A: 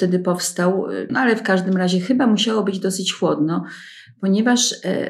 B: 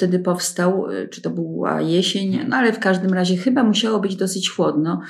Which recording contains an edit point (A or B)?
A